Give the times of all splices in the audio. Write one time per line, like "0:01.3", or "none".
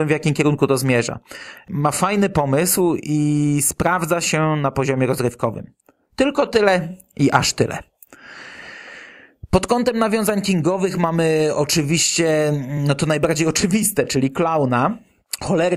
none